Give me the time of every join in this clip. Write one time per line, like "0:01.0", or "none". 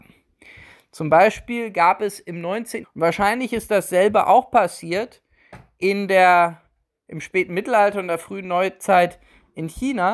0:02.8